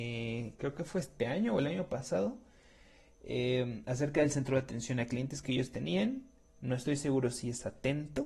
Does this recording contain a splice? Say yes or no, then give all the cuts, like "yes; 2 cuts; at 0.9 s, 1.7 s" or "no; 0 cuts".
yes; 1 cut; at 6.5 s